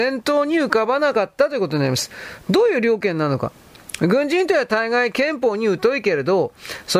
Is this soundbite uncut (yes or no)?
yes